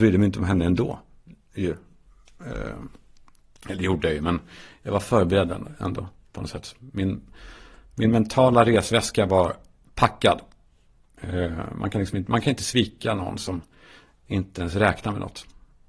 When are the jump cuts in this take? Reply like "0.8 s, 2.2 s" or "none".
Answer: none